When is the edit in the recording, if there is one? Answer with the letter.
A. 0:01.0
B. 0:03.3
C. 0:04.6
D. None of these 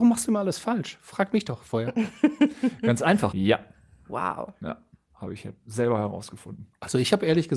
B